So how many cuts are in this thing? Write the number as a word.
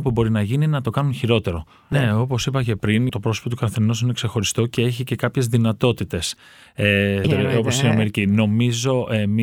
three